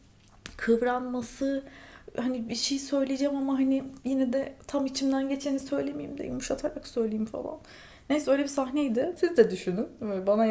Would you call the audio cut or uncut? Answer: cut